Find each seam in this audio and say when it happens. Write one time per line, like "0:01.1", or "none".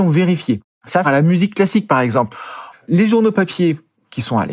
0:01.0
0:02.7

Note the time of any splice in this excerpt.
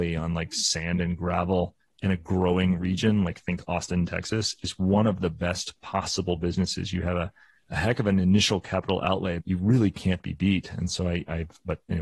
0:09.4

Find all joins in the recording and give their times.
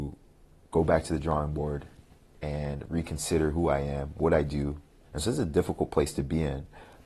0:05.0

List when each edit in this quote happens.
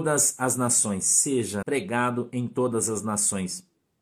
0:01.6

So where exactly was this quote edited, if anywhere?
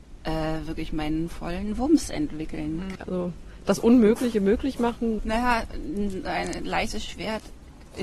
0:03.0
0:05.2

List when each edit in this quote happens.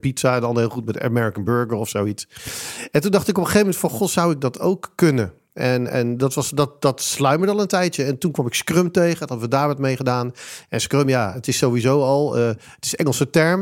none

